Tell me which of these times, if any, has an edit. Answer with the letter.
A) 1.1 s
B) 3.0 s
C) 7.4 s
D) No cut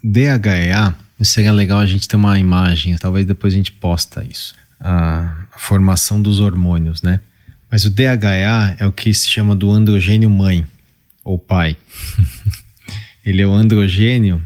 B